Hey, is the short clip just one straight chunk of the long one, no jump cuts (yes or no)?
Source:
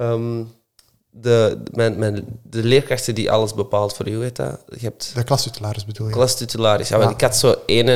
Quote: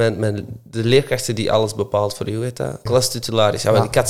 no